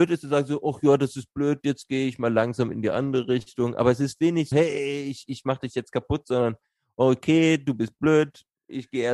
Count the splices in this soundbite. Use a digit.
1